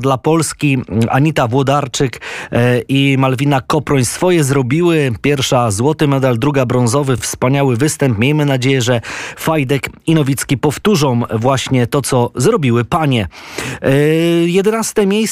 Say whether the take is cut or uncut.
uncut